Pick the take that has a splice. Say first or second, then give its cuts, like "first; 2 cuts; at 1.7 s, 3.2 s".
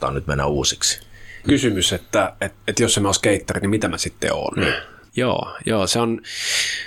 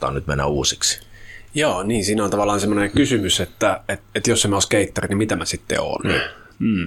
first; 2 cuts; at 1.4 s, 5.1 s